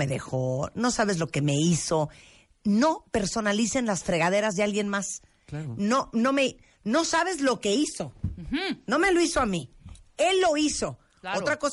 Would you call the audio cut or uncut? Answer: uncut